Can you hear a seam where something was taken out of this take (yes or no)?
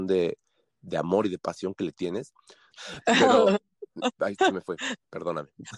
yes